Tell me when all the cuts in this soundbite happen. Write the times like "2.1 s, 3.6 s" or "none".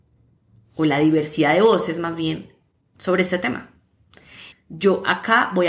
4.5 s